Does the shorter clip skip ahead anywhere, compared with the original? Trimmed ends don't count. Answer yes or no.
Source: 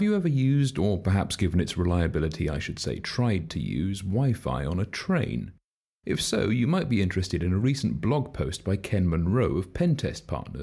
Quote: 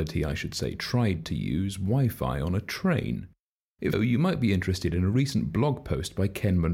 yes